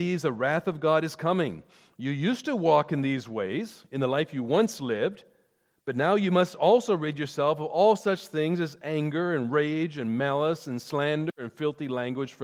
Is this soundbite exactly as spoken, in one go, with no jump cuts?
yes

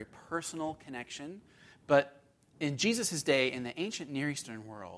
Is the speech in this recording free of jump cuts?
no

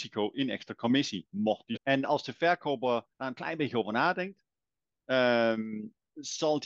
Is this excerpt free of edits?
no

